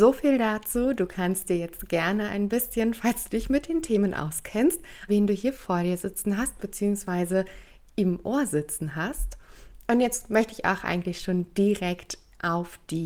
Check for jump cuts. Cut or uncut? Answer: cut